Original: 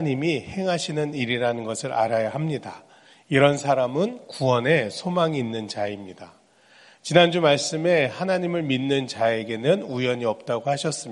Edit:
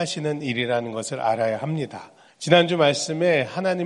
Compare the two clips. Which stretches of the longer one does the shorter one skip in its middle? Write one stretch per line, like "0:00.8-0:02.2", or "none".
0:03.0-0:06.9